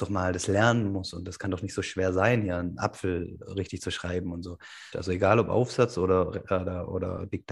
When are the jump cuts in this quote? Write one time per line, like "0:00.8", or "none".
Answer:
0:04.9